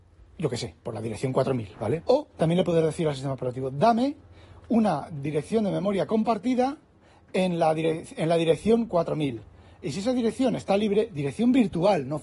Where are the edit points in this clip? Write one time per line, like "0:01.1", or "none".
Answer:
0:02.0